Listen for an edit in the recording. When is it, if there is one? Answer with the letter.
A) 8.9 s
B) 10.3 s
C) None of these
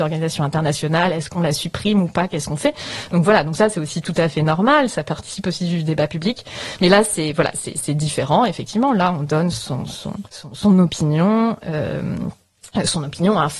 B